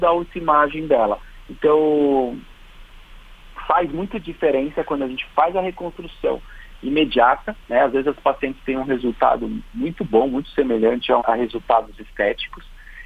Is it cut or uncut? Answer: cut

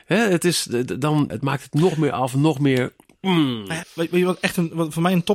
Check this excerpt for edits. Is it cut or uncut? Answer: cut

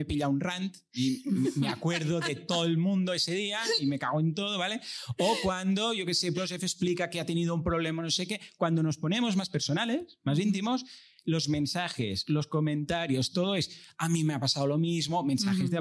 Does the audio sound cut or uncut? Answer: cut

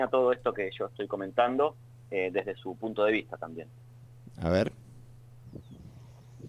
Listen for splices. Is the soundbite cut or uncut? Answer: uncut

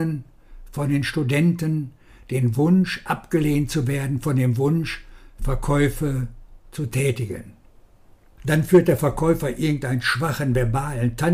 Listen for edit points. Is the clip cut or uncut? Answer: cut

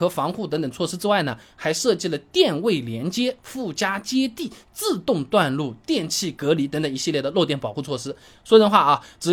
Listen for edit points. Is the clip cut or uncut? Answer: uncut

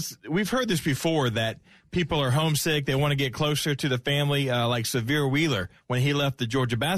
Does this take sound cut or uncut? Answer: uncut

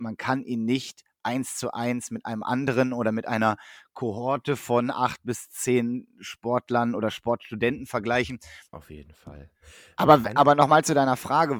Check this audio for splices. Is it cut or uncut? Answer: cut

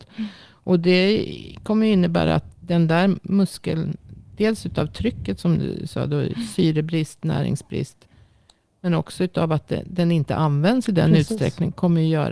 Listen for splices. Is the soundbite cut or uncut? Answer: uncut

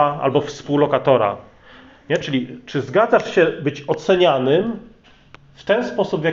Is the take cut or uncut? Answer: uncut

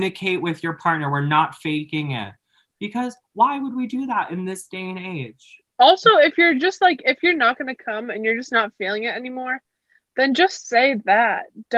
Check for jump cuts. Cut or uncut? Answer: uncut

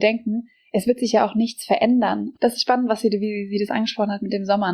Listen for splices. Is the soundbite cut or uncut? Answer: cut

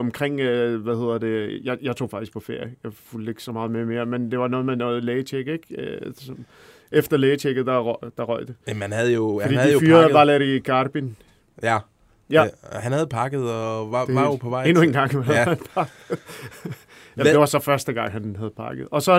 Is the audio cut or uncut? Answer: uncut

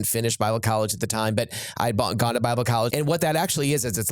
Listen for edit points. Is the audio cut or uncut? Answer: cut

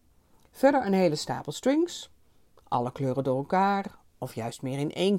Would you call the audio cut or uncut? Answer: uncut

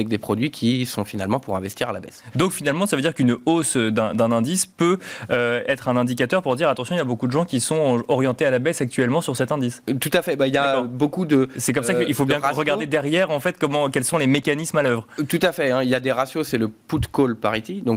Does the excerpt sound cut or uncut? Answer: uncut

